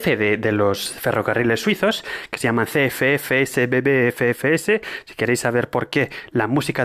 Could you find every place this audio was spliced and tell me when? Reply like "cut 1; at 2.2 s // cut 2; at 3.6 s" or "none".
none